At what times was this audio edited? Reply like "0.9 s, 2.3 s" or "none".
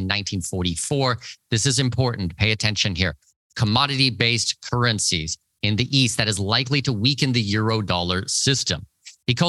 1.4 s